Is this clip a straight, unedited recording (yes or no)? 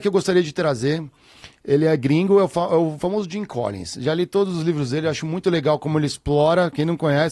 yes